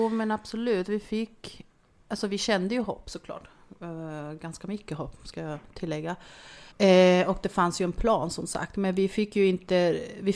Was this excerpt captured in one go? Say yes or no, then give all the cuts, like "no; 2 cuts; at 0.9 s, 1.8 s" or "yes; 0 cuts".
no; 1 cut; at 6.7 s